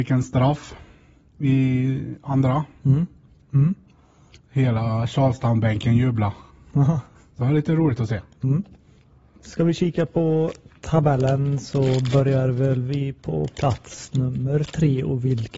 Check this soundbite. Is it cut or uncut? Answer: cut